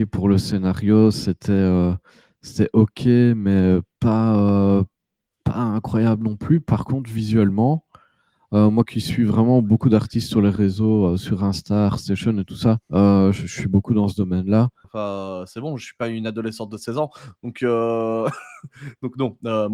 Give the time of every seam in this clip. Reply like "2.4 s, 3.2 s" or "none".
12.8 s, 14.8 s